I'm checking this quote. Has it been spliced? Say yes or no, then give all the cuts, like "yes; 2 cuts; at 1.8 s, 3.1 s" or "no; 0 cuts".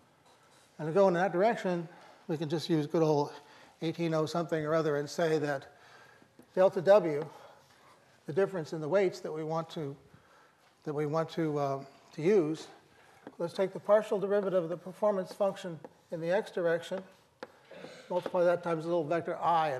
yes; 1 cut; at 13.3 s